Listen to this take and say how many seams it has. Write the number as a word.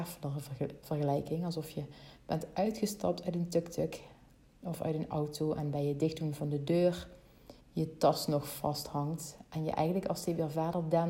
one